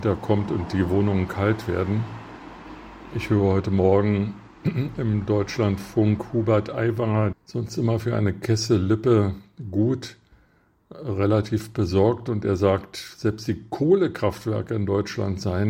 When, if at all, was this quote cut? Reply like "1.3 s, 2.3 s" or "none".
7.3 s